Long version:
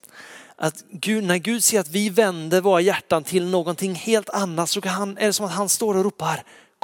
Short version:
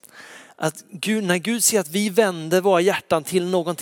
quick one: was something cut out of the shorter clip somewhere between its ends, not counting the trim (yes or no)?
no